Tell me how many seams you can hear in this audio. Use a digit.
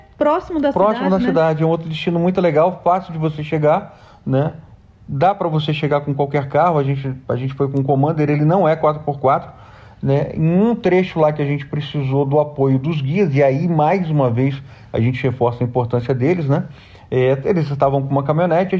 0